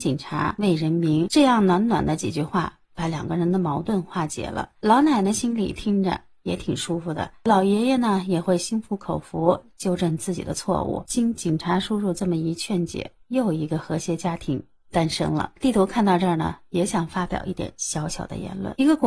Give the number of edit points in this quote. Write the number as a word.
zero